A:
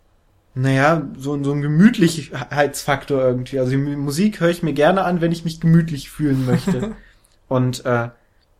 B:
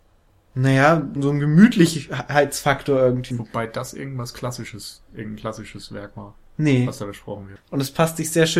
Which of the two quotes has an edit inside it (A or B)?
B